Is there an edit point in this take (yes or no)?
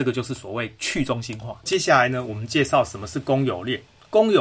no